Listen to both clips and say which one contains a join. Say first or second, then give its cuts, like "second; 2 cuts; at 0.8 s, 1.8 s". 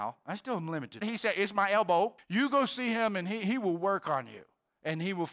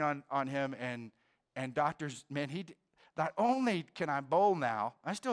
first; 2 cuts; at 1.0 s, 2.2 s